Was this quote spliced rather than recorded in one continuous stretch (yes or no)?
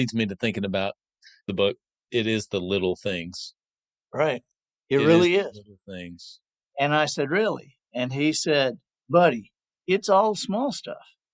yes